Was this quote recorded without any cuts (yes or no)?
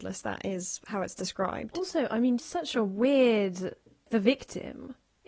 no